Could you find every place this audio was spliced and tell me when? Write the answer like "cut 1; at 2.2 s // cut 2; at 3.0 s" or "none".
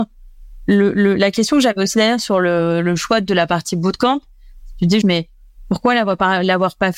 cut 1; at 5.0 s